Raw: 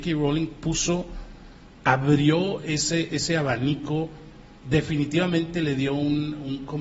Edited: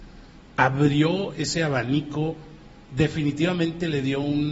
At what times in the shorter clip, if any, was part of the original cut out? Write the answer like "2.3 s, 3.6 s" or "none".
1.3 s